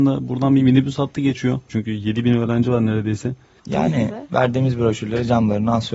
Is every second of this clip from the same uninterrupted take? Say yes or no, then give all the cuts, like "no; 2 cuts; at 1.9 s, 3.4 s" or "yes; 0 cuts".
no; 2 cuts; at 1.7 s, 3.6 s